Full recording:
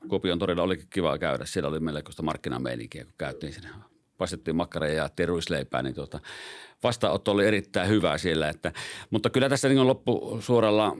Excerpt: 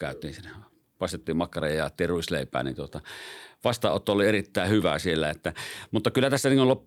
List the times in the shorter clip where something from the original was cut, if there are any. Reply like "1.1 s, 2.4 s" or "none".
none